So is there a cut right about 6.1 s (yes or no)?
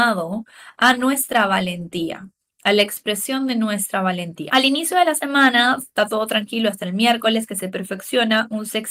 no